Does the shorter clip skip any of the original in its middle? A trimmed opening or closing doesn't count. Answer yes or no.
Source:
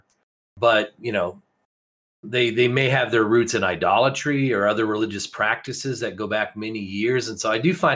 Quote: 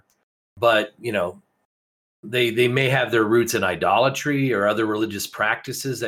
no